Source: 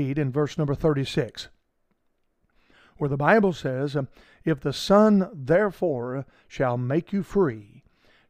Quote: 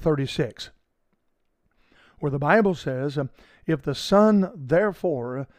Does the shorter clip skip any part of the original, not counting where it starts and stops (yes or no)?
no